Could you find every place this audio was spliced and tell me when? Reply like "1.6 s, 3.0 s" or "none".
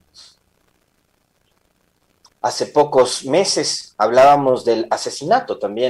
2.3 s